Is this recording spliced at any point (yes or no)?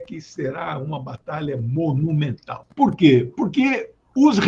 yes